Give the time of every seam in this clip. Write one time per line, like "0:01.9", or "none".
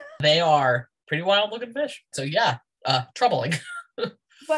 0:02.1